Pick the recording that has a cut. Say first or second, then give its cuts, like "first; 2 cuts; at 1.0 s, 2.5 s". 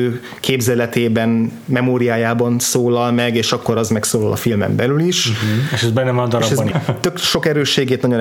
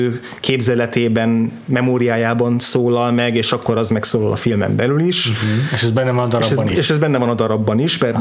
first; 1 cut; at 6.7 s